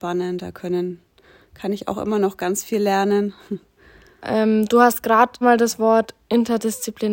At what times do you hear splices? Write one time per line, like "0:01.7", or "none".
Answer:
0:04.2
0:05.4